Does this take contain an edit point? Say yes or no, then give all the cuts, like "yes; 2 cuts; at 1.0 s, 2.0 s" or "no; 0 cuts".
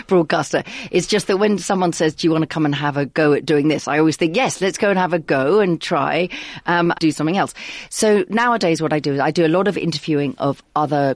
yes; 1 cut; at 6.9 s